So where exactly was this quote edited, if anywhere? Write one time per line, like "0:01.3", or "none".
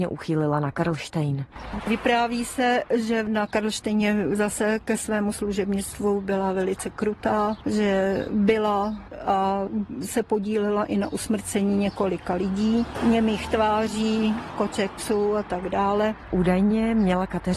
0:01.8